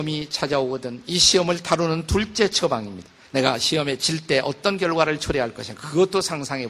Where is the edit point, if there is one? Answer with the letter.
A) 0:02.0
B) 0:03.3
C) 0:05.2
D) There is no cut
B